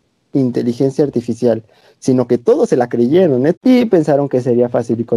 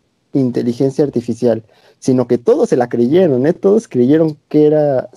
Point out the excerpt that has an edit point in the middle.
first; 1 cut; at 3.6 s

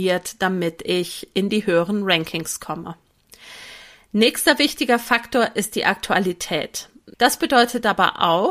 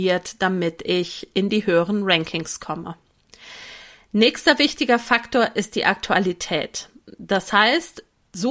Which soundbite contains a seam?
first; 1 cut; at 7.1 s

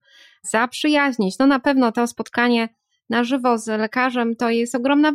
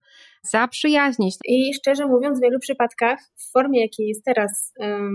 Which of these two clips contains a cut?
second; 1 cut; at 1.4 s

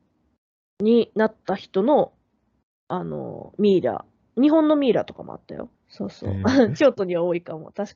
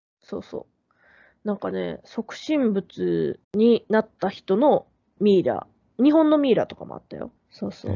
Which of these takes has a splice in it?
second; 2 cuts; at 3.4 s, 5.2 s

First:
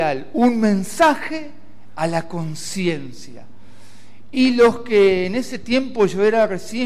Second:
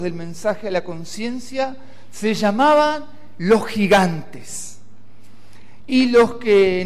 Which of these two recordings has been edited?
second; 1 cut; at 5.8 s

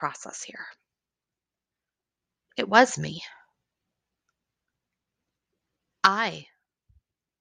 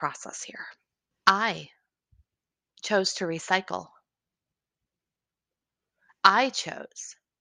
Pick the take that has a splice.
second; 1 cut; at 1.1 s

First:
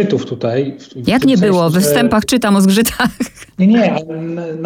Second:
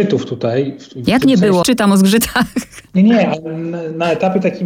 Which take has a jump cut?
second; 1 cut; at 1.6 s

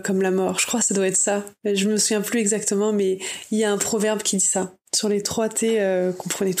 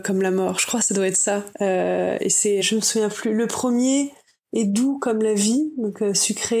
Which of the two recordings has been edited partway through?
second; 2 cuts; at 1.5 s, 2.6 s

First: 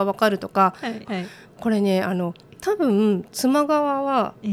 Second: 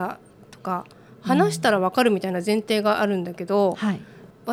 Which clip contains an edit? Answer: first; 1 cut; at 1.1 s

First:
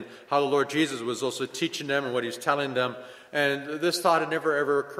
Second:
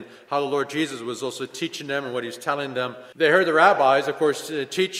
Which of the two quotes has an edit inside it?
second; 1 cut; at 3.1 s

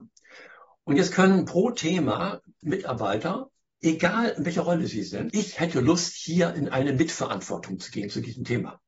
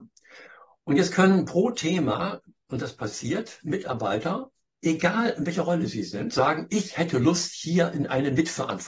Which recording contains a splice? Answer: first; 2 cuts; at 2.6 s, 5.3 s

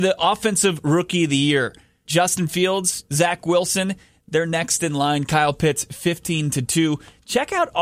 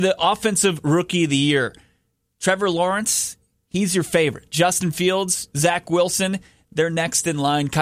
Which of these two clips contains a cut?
first; 1 cut; at 2.1 s

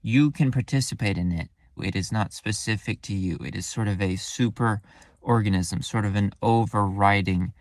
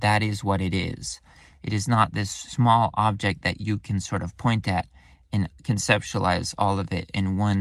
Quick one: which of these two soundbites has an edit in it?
first; 1 cut; at 1.8 s

